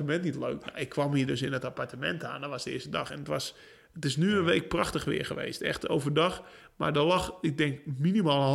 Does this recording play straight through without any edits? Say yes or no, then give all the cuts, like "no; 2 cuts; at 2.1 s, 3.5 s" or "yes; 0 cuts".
yes; 0 cuts